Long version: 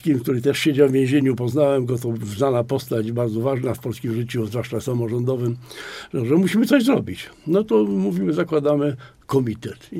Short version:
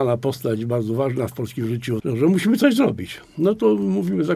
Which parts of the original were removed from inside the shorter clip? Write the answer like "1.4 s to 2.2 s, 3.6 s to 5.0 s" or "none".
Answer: 4.5 s to 6.1 s